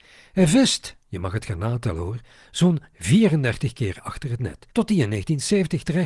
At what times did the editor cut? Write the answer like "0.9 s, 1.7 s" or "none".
4.7 s